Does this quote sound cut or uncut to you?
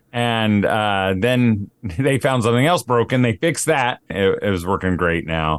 cut